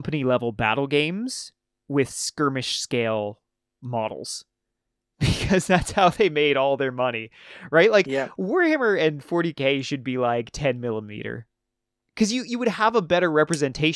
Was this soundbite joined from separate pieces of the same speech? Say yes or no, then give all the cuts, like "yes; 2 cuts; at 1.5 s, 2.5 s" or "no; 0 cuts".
no; 0 cuts